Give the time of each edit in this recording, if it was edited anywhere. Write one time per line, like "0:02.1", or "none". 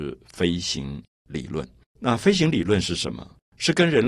0:01.8